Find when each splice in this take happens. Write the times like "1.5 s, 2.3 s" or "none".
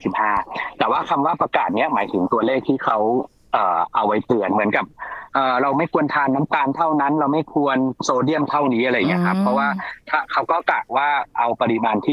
none